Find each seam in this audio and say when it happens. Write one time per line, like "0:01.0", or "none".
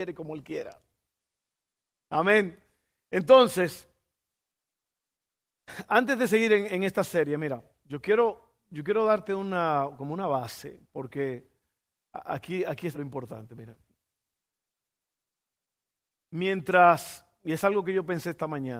0:12.9